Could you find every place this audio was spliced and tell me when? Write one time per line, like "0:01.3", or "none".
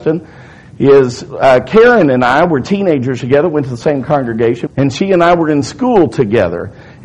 0:04.7